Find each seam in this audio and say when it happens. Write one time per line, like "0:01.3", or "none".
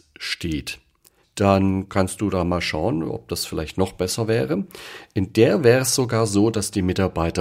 0:01.2